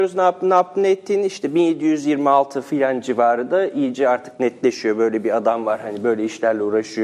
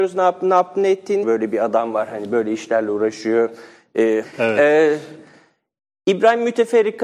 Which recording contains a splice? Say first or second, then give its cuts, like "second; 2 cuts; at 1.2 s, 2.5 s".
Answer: second; 2 cuts; at 1.2 s, 4.2 s